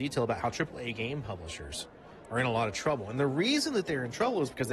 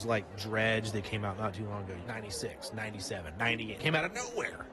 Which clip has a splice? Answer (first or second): second